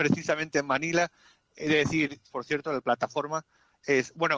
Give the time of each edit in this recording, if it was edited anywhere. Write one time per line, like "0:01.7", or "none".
0:02.3

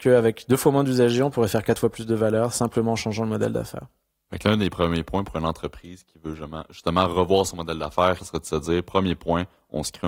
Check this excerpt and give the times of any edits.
0:08.2

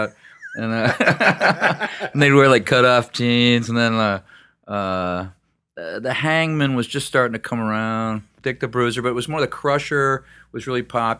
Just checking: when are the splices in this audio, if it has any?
none

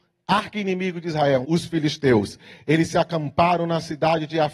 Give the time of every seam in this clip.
0:01.4

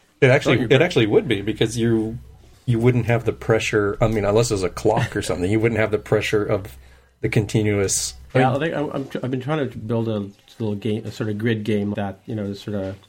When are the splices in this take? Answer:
0:08.3
0:11.9

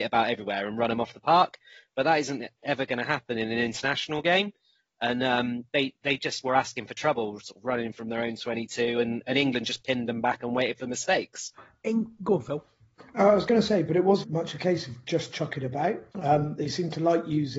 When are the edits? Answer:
0:14.2
0:16.1

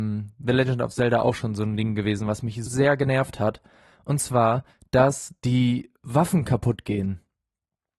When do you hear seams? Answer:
0:02.7

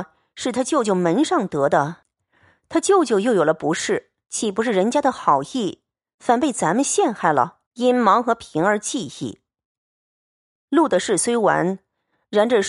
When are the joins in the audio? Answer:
0:04.2
0:07.7

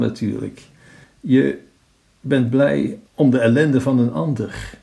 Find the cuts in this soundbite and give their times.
0:01.0
0:03.1

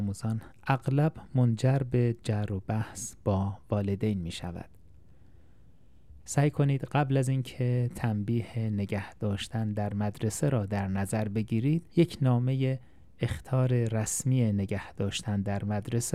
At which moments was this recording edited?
0:06.2
0:11.9

